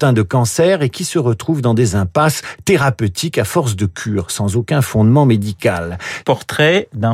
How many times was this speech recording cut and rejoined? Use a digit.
1